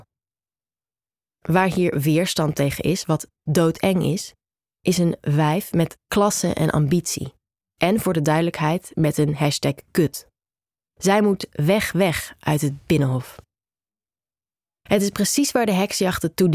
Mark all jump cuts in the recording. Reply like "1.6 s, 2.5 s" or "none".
none